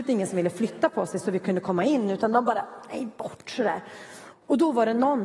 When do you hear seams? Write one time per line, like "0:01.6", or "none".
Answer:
0:04.3